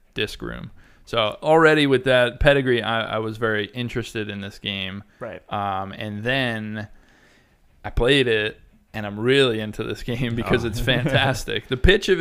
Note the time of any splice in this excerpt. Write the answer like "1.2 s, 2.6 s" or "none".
none